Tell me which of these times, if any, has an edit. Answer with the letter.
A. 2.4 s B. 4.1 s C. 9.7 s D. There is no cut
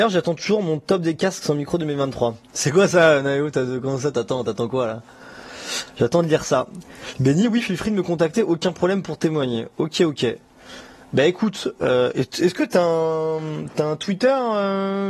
B